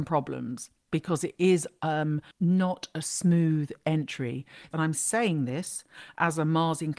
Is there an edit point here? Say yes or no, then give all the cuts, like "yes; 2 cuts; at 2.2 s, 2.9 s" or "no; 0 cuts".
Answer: yes; 2 cuts; at 2.3 s, 4.7 s